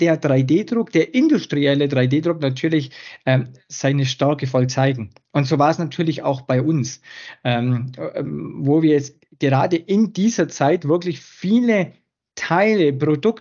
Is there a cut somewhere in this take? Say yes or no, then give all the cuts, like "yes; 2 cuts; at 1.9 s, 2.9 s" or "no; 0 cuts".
no; 0 cuts